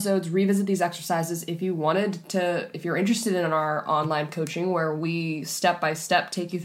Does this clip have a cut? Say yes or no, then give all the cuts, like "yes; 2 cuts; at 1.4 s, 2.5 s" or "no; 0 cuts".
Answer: no; 0 cuts